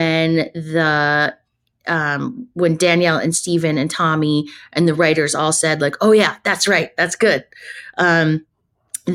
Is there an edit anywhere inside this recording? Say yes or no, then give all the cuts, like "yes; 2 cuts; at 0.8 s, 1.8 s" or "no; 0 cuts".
no; 0 cuts